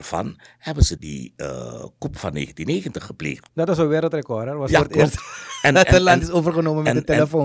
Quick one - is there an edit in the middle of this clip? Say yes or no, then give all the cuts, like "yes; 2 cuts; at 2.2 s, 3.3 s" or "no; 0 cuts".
yes; 2 cuts; at 1.0 s, 3.5 s